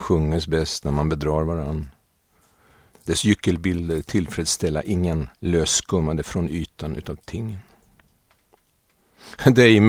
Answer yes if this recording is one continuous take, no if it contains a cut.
no